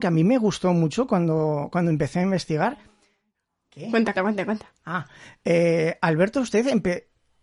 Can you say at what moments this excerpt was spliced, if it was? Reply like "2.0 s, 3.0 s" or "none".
4.1 s